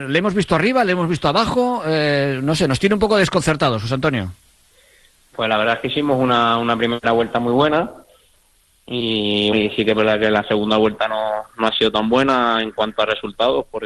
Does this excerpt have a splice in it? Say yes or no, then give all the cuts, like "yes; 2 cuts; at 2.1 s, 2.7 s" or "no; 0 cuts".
yes; 1 cut; at 9.5 s